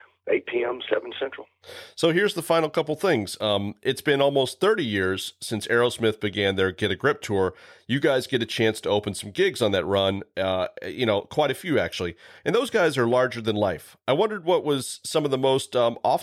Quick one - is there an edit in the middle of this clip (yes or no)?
no